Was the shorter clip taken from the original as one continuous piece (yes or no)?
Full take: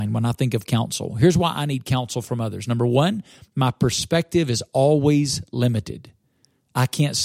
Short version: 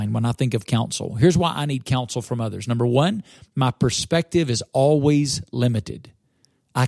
yes